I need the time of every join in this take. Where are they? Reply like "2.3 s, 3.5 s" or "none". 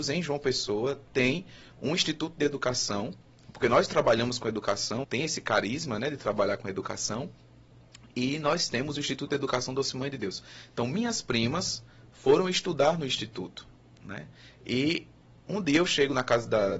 5.0 s